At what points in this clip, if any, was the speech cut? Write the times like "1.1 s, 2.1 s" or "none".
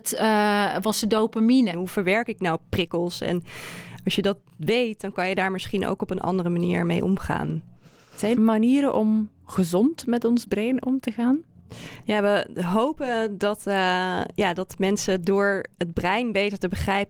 1.7 s, 8.3 s, 12.0 s

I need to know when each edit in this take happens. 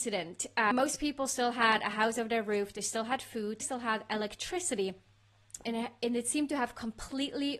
3.6 s, 5.6 s

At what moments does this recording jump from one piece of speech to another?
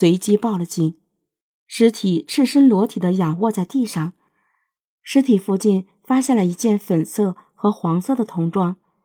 1.6 s

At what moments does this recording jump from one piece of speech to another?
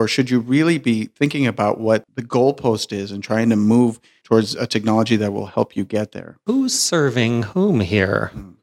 none

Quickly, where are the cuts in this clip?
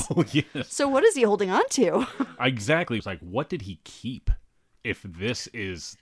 3.0 s

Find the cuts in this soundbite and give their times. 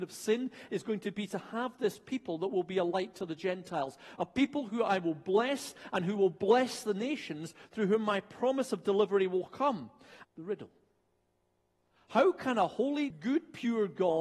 10.2 s, 13.1 s

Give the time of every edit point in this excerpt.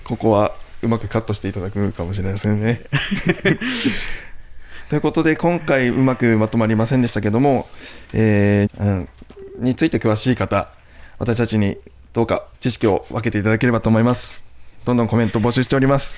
8.7 s, 12.5 s

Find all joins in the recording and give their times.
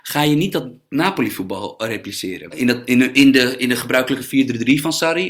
2.5 s

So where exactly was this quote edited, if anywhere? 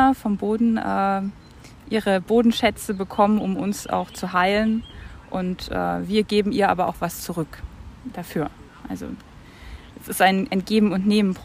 none

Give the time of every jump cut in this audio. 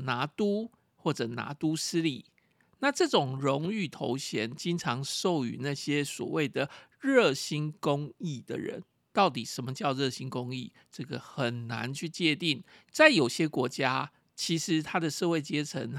9.1 s, 12.8 s

